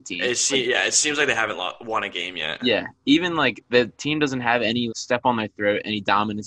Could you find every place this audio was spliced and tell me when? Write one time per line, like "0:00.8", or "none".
0:03.7
0:04.9

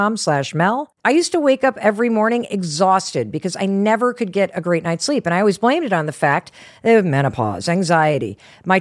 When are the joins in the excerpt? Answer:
0:01.0

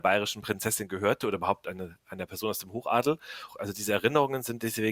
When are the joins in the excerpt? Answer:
0:03.5

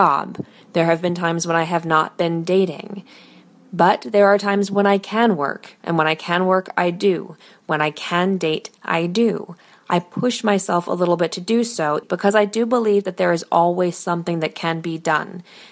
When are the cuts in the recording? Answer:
0:12.0

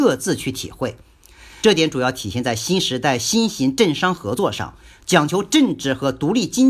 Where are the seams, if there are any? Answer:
0:01.6

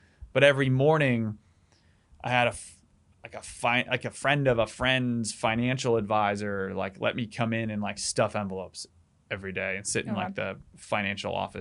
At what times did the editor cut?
0:03.1
0:08.0

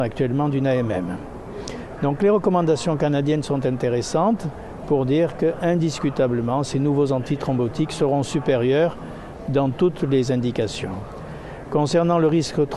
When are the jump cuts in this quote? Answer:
0:01.9

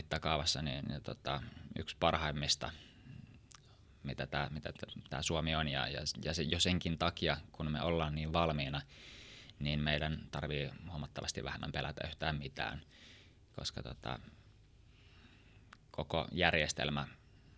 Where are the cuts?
none

